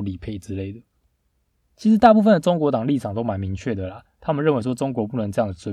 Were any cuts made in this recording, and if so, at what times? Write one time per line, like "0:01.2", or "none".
0:01.6